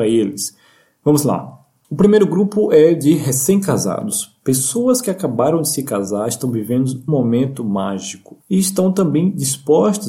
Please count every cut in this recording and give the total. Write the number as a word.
two